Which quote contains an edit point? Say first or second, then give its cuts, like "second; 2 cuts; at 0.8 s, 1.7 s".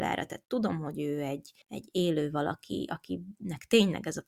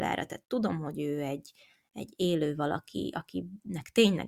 first; 1 cut; at 1.6 s